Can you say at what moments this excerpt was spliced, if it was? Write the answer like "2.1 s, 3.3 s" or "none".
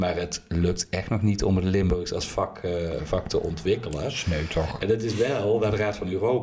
none